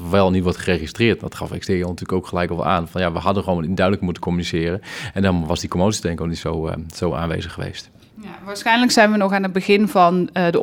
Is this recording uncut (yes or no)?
yes